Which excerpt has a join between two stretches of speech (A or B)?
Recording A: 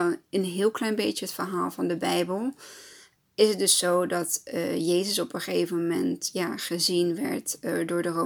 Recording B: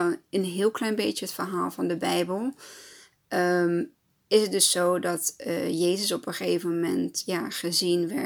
A